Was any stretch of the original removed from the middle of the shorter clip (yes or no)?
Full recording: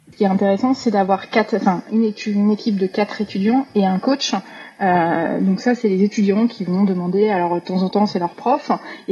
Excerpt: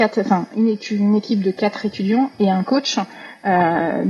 no